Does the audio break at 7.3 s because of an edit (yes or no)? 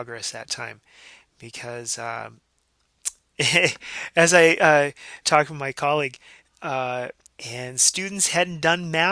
yes